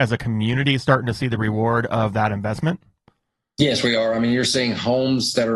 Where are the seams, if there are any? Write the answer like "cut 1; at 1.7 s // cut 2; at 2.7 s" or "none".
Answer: none